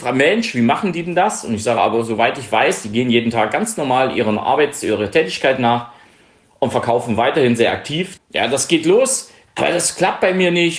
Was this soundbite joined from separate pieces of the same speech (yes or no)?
yes